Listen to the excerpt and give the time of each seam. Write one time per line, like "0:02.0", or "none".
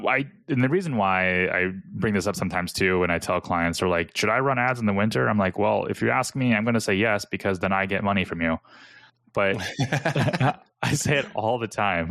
none